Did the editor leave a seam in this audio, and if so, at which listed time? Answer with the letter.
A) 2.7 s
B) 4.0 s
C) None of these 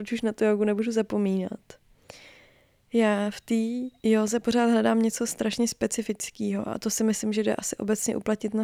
B